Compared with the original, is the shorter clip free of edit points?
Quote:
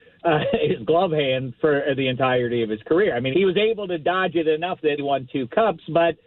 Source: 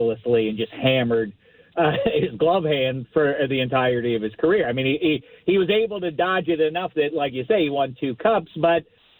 no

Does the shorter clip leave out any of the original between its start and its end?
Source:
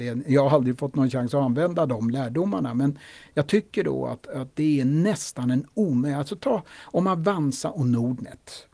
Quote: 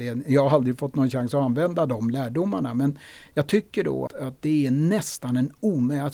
yes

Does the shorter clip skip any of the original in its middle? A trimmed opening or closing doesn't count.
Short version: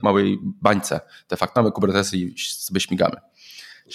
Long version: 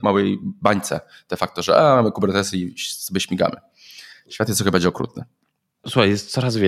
yes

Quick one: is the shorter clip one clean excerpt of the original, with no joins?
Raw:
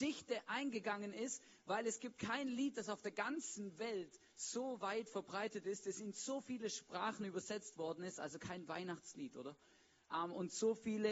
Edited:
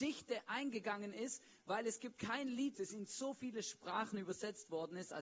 no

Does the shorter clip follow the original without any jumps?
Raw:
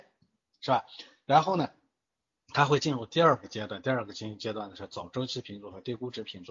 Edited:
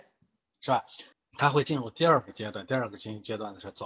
no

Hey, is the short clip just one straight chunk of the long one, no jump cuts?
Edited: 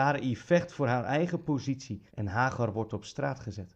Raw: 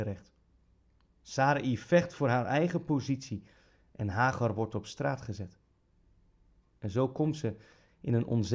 no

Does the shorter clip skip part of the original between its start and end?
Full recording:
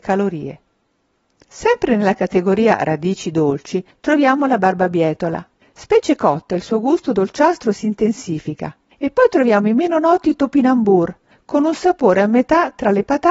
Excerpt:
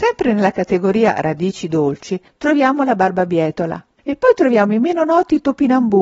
yes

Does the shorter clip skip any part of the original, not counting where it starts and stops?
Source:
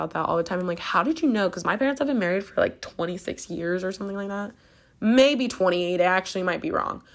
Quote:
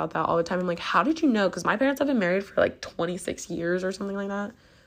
no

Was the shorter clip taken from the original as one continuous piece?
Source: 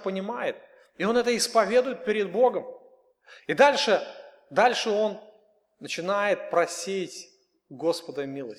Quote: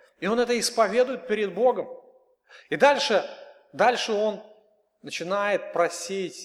yes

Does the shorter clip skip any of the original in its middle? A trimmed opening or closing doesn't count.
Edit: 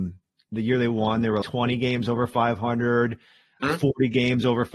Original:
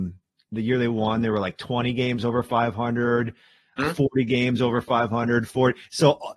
yes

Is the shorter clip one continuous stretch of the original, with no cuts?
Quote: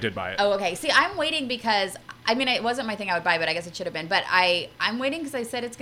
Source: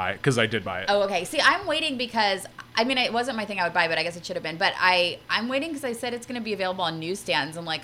yes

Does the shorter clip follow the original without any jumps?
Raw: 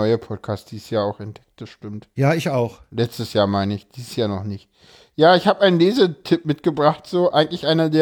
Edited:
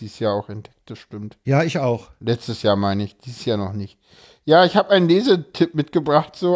yes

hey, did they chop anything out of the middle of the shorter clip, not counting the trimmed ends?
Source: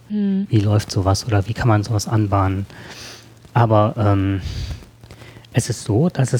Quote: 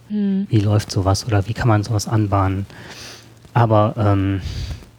no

